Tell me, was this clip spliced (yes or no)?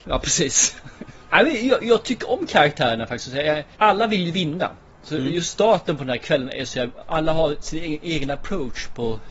no